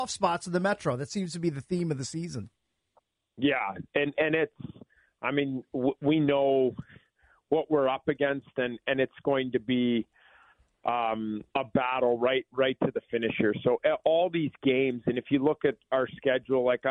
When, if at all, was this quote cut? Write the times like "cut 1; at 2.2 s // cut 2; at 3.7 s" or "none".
cut 1; at 11.5 s